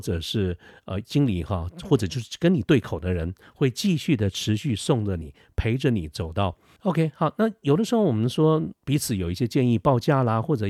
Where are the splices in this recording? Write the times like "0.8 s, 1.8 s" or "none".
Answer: 6.8 s, 8.7 s